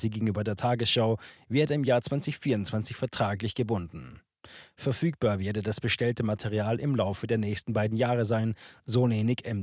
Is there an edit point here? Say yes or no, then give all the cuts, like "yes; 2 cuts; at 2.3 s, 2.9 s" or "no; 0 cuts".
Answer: no; 0 cuts